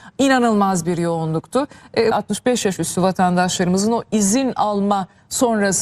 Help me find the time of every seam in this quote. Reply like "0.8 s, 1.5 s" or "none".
2.1 s